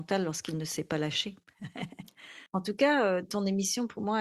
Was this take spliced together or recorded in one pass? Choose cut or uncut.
cut